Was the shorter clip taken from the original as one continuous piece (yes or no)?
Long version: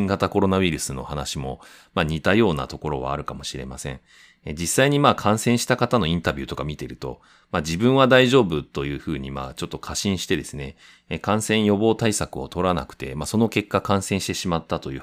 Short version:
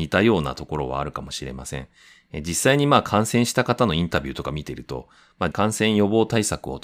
no